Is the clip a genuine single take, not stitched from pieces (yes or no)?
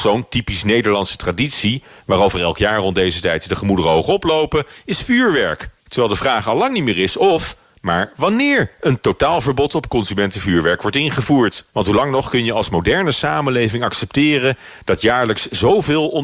no